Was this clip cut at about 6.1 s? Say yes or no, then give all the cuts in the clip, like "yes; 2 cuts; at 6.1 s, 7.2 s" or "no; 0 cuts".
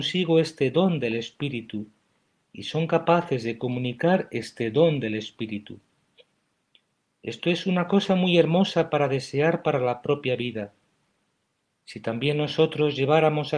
no; 0 cuts